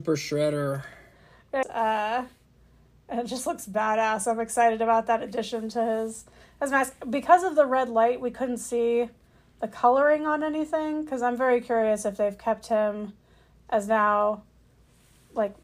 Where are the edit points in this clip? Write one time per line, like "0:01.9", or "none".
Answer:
0:01.6